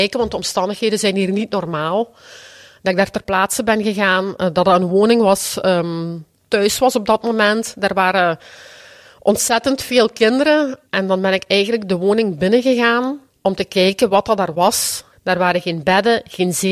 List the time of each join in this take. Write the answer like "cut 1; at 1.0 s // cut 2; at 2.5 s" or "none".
cut 1; at 6.4 s // cut 2; at 15.1 s